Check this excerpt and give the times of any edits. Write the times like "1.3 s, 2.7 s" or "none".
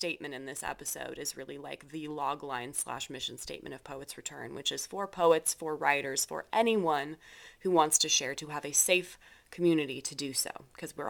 none